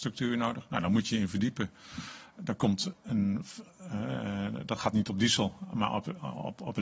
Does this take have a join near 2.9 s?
yes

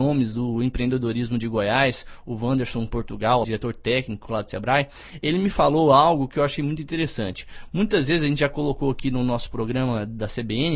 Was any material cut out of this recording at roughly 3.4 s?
yes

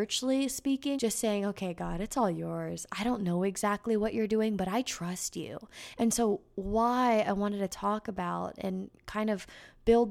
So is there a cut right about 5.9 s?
yes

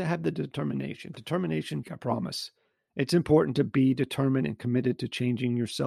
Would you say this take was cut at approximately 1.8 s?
yes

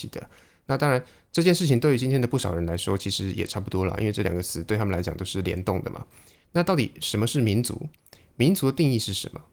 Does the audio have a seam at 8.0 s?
no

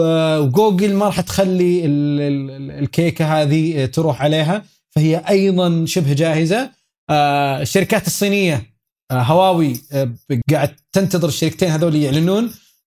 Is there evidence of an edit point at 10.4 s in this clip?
yes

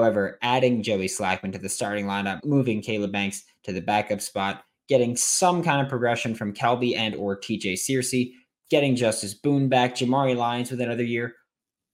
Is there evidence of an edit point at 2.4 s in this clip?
yes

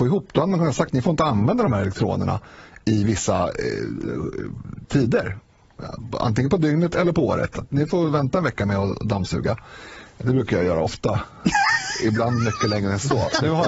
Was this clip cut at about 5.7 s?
no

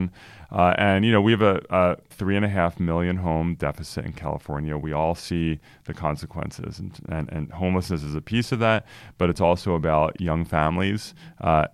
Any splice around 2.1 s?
yes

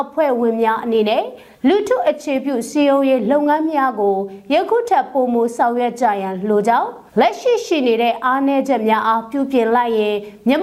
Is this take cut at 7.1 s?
yes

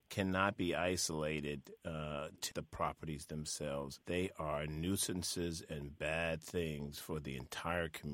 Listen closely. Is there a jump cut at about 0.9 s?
no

